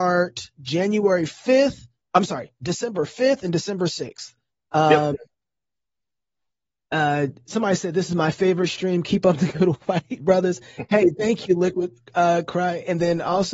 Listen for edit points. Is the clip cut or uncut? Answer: uncut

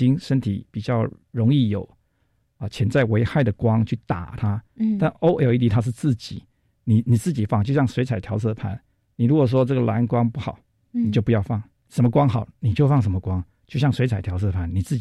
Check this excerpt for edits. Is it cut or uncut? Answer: uncut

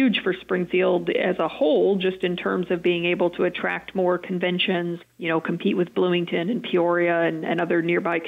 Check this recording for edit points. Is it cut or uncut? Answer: cut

